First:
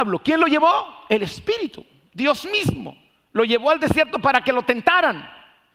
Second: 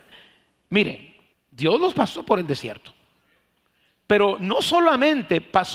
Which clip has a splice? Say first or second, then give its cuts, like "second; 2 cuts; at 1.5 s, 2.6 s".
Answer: second; 1 cut; at 1.3 s